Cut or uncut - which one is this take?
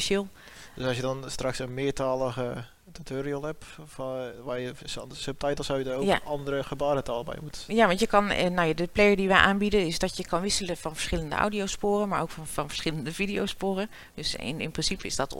cut